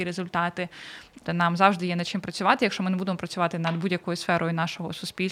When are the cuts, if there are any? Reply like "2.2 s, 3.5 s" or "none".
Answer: 1.3 s